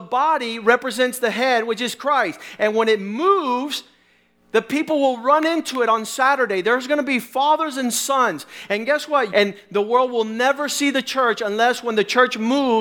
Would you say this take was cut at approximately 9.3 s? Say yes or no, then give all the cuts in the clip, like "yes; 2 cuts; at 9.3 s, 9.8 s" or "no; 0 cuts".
yes; 1 cut; at 9.3 s